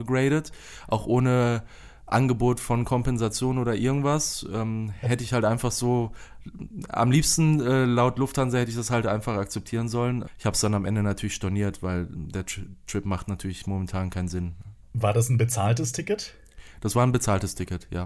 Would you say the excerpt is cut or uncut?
uncut